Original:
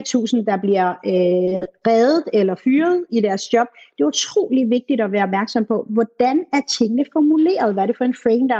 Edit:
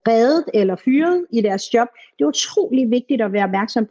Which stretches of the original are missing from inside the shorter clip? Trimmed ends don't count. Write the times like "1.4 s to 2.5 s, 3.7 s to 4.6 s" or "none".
none

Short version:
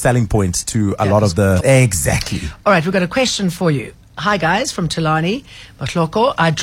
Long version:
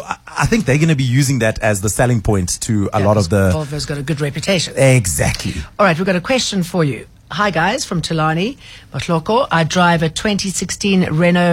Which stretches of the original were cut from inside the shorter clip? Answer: 3.5 s to 4.7 s

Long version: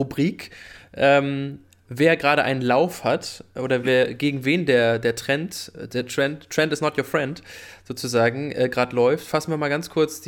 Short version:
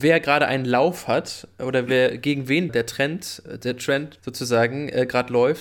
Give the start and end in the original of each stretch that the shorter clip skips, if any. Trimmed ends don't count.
4.7 s to 5.0 s, 6.5 s to 7.8 s

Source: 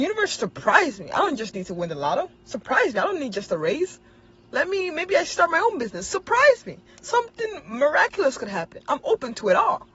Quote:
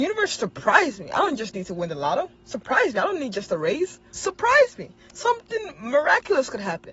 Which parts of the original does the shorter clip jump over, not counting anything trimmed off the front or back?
4.1 s to 6.0 s

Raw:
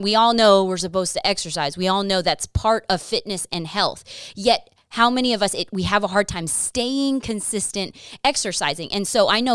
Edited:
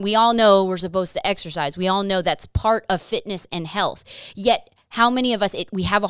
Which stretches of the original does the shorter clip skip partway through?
none

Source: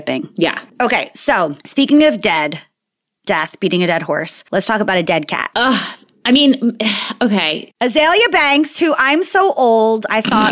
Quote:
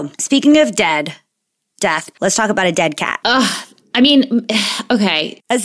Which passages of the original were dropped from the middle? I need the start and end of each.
3.6 s to 4.4 s

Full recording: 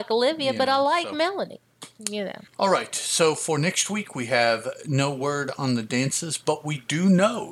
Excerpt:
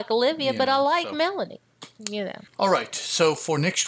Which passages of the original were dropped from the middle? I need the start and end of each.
none

